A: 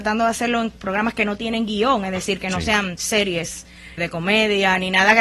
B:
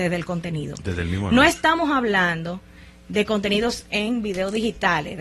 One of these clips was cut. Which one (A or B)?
A